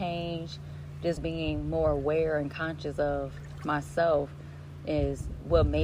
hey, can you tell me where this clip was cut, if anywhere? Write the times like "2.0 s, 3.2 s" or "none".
1.2 s